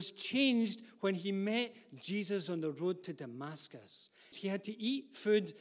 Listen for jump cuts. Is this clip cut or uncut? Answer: cut